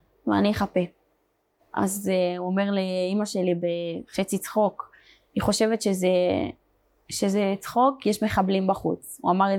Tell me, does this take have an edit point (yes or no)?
yes